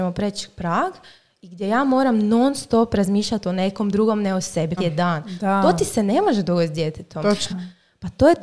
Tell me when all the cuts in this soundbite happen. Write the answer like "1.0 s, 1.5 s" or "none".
4.8 s, 7.5 s